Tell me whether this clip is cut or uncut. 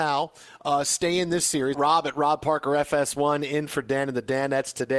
cut